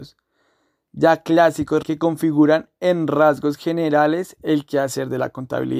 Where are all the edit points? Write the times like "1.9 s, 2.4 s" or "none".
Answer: 1.8 s